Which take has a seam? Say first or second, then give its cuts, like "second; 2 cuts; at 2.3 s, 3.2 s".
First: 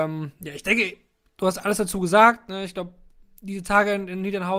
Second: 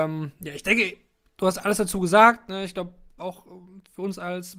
second; 1 cut; at 3.2 s